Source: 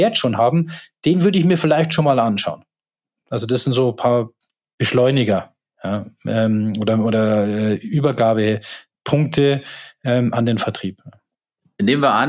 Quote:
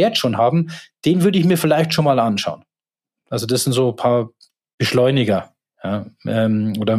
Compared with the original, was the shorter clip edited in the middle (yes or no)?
no